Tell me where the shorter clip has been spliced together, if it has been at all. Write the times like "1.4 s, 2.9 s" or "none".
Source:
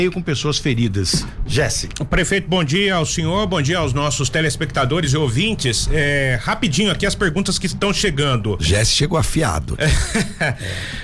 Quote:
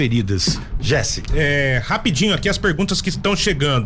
1.3 s